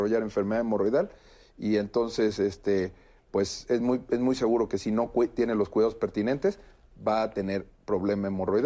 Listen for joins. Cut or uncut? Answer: uncut